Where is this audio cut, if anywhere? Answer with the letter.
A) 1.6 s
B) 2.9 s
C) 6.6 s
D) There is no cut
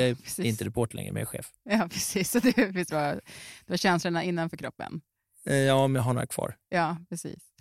B